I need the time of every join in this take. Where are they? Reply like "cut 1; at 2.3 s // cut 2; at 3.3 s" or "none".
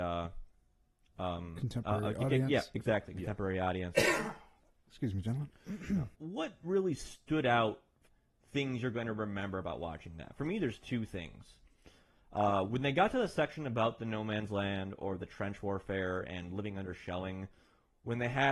none